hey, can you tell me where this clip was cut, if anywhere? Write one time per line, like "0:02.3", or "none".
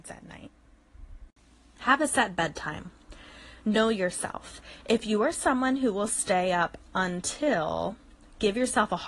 0:01.8